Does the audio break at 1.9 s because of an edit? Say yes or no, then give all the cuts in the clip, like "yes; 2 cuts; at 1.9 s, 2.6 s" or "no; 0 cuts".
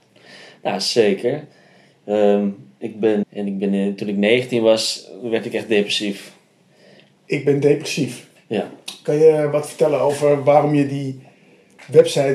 no; 2 cuts; at 3.2 s, 7.2 s